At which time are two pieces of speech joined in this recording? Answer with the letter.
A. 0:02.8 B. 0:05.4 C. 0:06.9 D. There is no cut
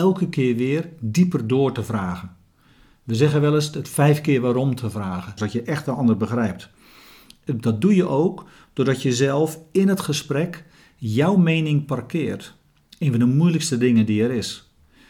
B